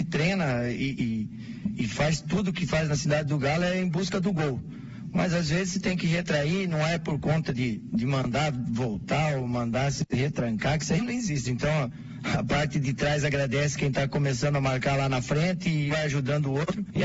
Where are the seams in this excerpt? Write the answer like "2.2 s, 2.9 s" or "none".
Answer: 1.8 s, 11.4 s, 15.9 s